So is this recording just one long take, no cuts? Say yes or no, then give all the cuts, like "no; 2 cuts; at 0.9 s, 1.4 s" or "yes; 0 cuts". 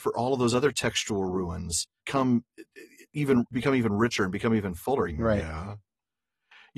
no; 2 cuts; at 2.0 s, 5.1 s